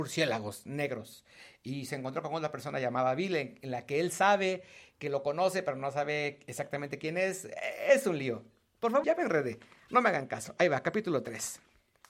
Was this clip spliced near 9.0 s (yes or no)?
yes